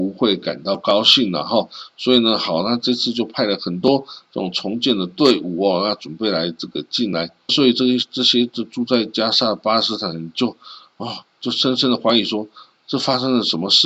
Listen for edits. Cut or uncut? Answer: cut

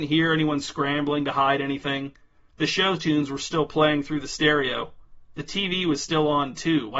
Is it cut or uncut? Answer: uncut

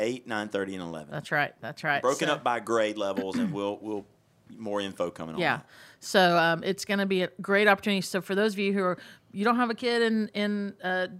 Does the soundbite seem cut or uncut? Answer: uncut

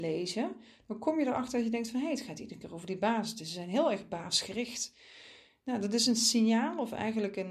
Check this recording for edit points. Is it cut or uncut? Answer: uncut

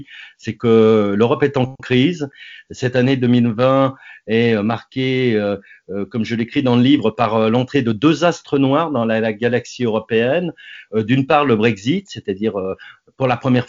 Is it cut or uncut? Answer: uncut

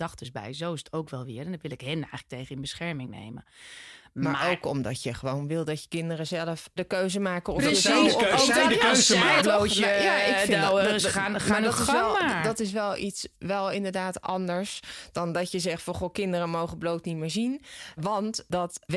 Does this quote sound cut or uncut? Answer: cut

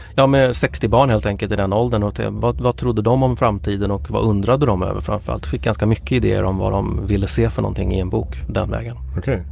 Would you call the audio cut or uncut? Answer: uncut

